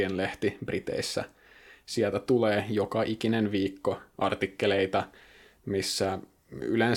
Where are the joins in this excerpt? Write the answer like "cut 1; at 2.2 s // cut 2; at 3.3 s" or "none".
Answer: none